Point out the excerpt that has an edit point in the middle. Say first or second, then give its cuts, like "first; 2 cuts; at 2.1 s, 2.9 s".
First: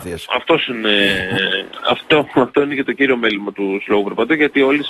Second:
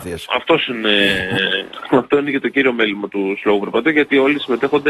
second; 1 cut; at 1.8 s